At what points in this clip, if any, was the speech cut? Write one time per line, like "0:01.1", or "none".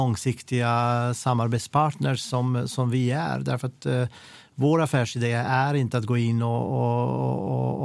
none